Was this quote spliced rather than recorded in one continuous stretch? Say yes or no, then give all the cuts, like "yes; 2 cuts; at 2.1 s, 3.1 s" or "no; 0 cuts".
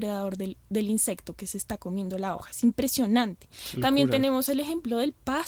no; 0 cuts